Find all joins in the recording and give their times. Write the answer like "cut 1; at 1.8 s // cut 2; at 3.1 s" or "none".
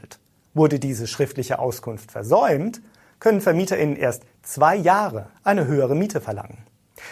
cut 1; at 5.3 s